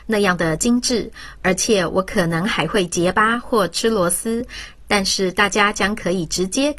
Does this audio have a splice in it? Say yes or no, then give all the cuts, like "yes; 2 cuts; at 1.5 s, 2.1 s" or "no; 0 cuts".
no; 0 cuts